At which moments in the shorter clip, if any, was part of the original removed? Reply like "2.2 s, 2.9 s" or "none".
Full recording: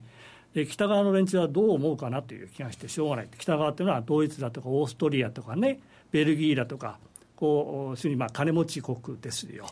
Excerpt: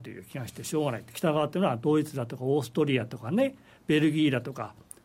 none

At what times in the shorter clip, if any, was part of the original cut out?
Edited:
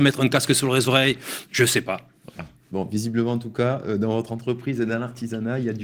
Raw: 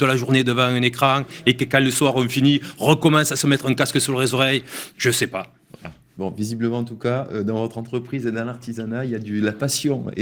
none

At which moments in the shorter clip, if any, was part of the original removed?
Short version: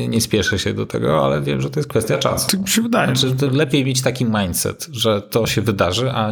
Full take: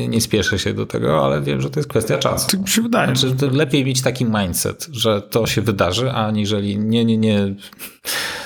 none

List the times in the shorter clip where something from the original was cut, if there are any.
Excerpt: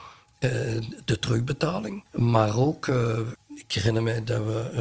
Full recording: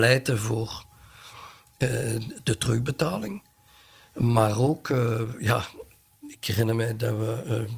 2.1 s, 3.3 s

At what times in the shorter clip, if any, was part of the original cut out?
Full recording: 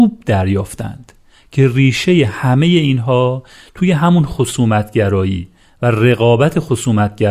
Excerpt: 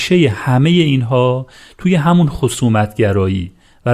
none

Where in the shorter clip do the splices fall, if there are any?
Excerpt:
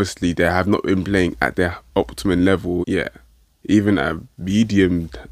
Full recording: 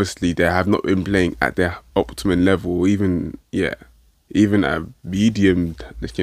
2.8 s

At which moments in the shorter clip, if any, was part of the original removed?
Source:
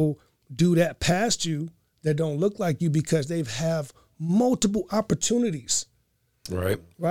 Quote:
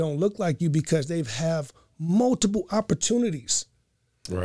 none

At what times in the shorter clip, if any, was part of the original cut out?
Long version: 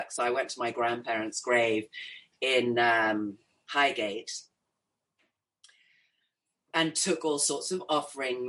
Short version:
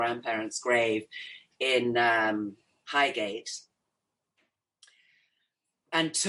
none

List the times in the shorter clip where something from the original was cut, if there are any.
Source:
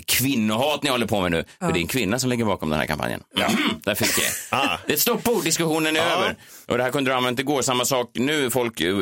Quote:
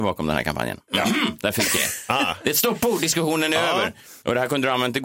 none

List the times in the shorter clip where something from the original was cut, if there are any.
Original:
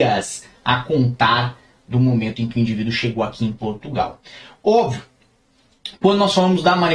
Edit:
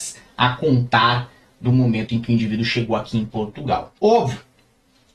4.0 s

